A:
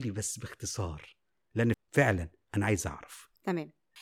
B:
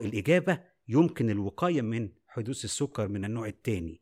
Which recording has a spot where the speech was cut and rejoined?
A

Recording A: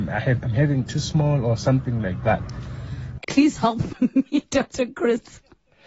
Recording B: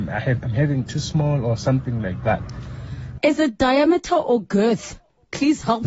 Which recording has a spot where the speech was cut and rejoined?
A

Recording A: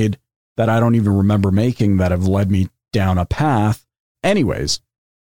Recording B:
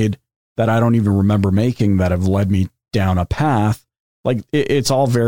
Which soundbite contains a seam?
A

